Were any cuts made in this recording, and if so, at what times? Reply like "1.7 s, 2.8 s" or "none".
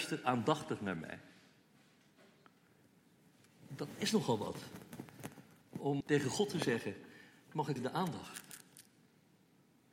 6.0 s, 7.8 s